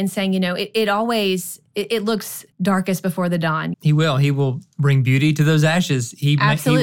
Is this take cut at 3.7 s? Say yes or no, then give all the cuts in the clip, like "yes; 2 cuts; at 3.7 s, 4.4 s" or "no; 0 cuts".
yes; 2 cuts; at 2.5 s, 3.7 s